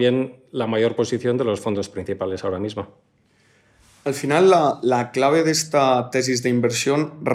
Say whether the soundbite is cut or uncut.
uncut